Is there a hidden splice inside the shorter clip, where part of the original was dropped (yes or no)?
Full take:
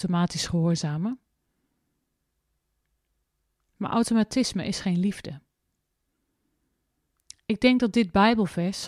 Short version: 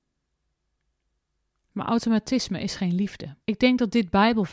yes